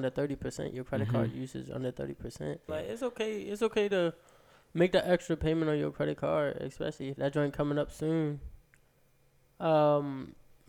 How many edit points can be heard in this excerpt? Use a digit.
2